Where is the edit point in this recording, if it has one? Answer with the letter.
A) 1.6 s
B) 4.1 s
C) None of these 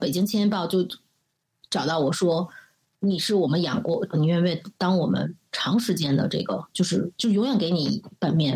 B